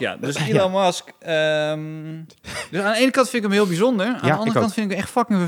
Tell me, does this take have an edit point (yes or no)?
no